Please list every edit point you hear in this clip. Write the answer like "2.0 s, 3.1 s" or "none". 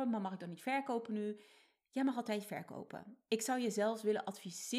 none